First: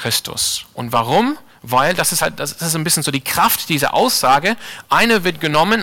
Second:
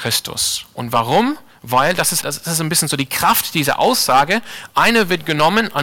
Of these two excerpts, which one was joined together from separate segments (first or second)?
second